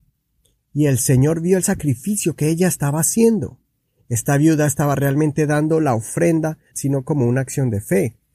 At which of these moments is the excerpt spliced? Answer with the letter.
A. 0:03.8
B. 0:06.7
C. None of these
B